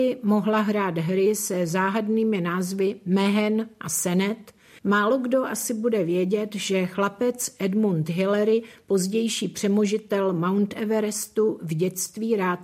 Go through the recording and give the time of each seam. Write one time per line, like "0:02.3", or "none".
0:04.8

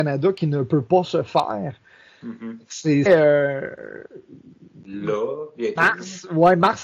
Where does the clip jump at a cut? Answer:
0:03.1

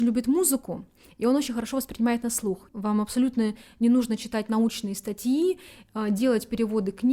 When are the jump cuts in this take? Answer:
0:02.7

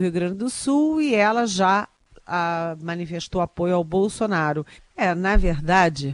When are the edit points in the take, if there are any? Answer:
0:04.7

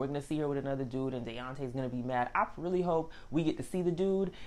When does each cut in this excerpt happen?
none

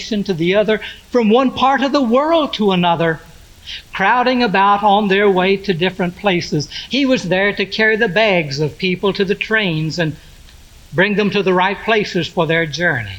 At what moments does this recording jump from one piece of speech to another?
0:06.9

